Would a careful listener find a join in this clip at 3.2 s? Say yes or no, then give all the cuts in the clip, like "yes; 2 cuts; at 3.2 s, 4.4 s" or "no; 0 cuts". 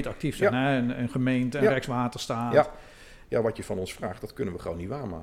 yes; 1 cut; at 3.2 s